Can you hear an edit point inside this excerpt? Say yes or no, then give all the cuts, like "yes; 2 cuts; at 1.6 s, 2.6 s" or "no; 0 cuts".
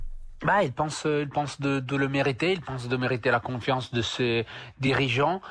no; 0 cuts